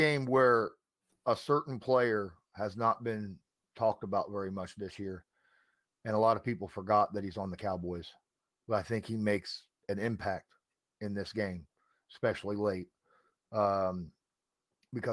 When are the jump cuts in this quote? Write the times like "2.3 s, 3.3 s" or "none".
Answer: none